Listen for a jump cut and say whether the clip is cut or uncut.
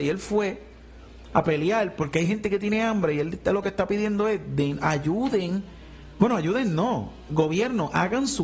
uncut